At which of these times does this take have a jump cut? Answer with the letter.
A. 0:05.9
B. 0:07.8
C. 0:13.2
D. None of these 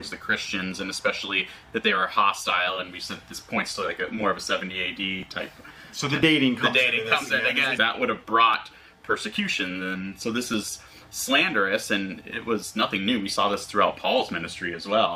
B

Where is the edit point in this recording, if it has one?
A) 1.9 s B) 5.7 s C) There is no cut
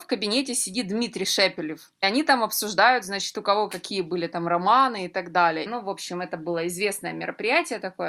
B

